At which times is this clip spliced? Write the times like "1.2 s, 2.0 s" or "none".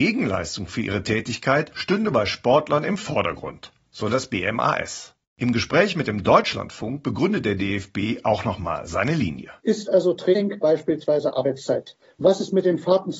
9.6 s